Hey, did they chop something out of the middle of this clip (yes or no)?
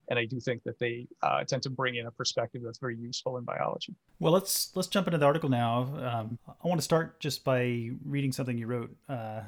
no